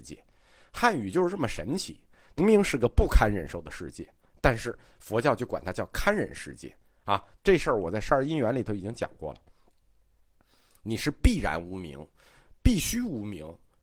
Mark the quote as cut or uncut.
cut